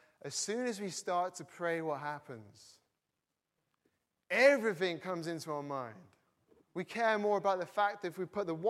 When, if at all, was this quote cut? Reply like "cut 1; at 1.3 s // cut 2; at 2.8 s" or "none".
cut 1; at 6.6 s